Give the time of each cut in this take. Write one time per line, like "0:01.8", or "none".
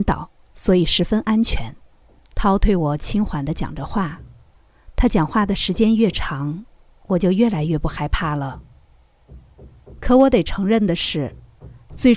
0:02.2